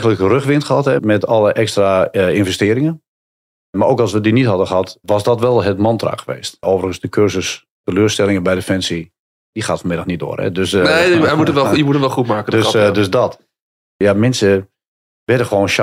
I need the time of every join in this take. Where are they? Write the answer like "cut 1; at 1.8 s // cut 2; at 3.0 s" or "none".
cut 1; at 1.0 s